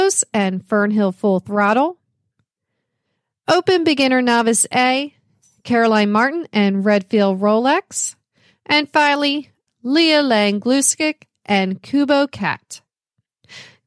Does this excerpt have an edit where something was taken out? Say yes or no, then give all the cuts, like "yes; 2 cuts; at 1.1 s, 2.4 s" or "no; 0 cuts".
yes; 1 cut; at 9.7 s